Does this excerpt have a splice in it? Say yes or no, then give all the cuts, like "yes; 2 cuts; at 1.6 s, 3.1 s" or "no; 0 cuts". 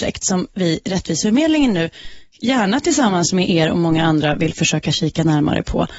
no; 0 cuts